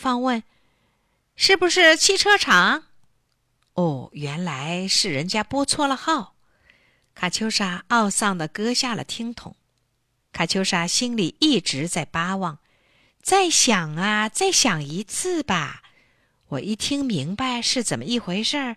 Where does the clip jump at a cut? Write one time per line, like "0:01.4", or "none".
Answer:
0:10.2

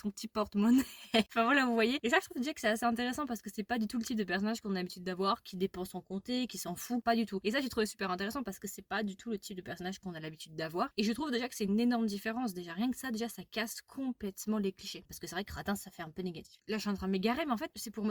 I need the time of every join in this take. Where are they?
0:01.3
0:15.1

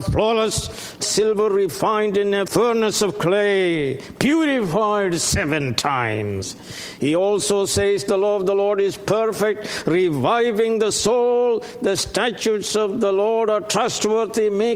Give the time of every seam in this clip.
0:01.0

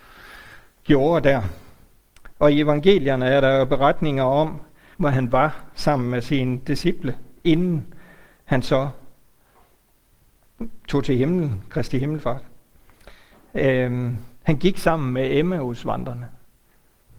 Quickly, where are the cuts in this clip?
0:04.9

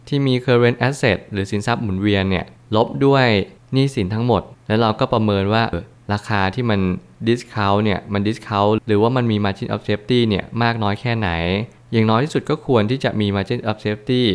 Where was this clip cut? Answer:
0:05.7

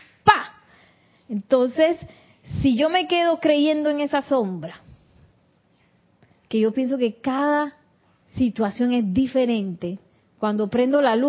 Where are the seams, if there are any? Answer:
none

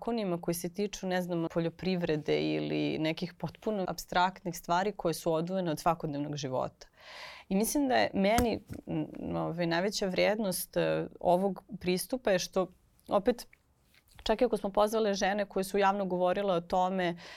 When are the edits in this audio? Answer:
0:01.5
0:03.9

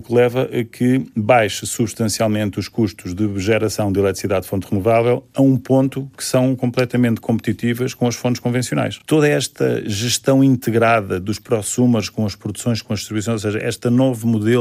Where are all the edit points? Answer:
none

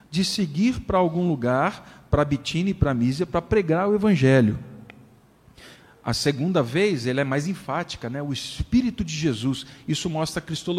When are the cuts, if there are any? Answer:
none

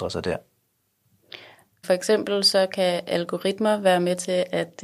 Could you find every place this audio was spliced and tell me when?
0:01.8

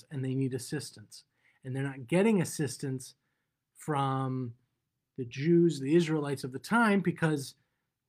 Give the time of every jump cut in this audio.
none

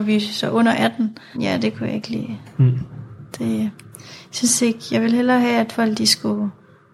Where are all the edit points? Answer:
0:01.3

